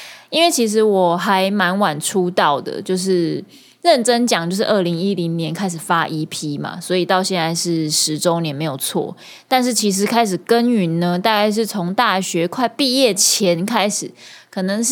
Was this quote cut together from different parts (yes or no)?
no